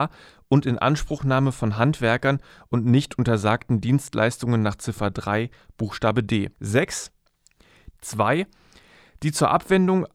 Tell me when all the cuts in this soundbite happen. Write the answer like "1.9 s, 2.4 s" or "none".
6.5 s, 7.9 s